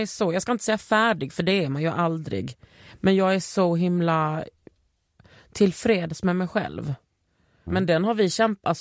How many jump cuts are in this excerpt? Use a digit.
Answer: 1